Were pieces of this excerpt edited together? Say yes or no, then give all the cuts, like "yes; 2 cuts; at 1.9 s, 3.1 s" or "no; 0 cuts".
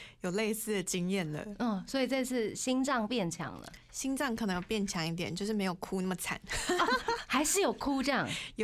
no; 0 cuts